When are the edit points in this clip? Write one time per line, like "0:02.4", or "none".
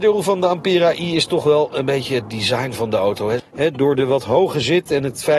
0:03.4